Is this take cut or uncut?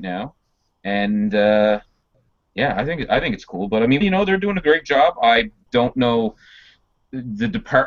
cut